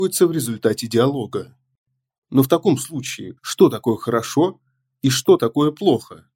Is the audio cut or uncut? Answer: cut